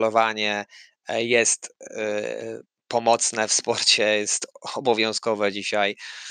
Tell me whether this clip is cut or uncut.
uncut